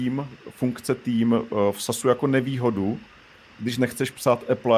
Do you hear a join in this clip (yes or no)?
no